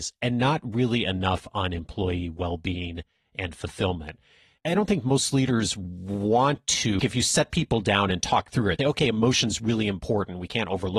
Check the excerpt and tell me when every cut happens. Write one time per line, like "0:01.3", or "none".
0:07.0
0:08.8